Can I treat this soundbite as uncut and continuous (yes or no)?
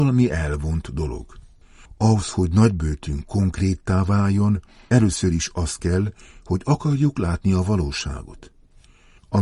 yes